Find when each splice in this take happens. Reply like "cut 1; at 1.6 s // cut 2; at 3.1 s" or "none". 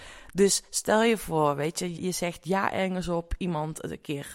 cut 1; at 2.0 s